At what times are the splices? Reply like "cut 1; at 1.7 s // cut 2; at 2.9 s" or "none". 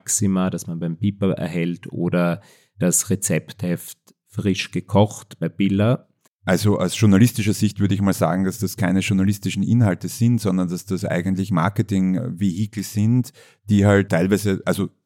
cut 1; at 6.3 s